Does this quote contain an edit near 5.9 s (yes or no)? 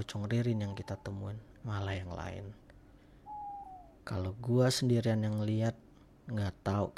no